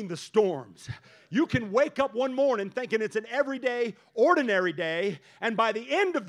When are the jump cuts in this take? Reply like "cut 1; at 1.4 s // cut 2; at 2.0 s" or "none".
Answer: none